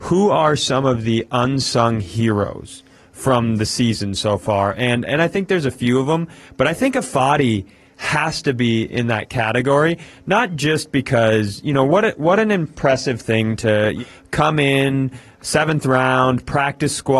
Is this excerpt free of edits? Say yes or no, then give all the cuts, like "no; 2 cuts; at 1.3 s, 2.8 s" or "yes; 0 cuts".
yes; 0 cuts